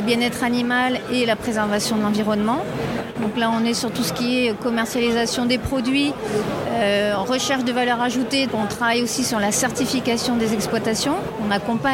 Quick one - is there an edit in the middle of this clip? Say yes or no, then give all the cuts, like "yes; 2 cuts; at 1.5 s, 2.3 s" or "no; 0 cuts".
yes; 2 cuts; at 3.1 s, 8.5 s